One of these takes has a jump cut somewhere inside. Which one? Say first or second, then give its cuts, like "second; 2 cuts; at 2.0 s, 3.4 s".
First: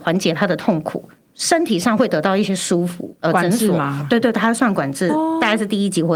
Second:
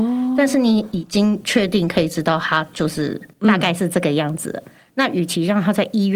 first; 2 cuts; at 3.2 s, 5.1 s